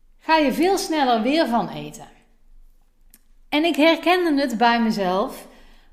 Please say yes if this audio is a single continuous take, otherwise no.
yes